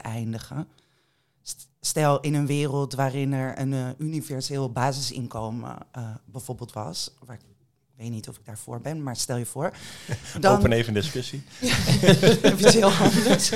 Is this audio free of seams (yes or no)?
yes